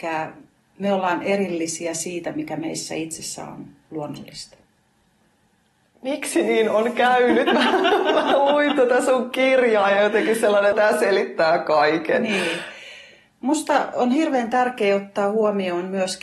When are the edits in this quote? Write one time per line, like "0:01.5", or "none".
0:10.7